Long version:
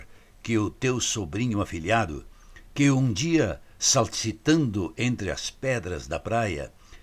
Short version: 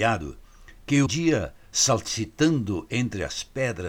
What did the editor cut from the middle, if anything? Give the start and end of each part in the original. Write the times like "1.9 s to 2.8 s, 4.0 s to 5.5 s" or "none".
2.9 s to 3.1 s